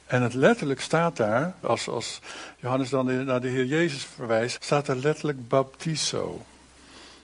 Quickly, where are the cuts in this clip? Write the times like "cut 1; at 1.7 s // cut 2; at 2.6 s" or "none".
cut 1; at 1.6 s // cut 2; at 4.6 s